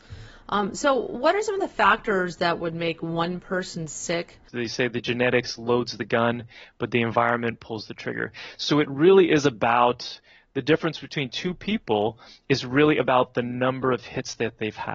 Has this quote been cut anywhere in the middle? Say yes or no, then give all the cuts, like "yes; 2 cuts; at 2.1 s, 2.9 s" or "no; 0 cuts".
yes; 1 cut; at 4.5 s